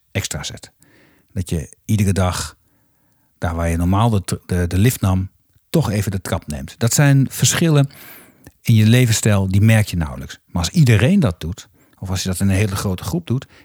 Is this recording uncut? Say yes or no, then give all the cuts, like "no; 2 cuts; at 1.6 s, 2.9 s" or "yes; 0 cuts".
yes; 0 cuts